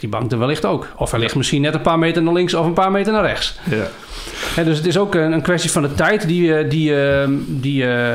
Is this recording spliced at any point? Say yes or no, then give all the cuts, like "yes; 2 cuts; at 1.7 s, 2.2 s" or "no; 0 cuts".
no; 0 cuts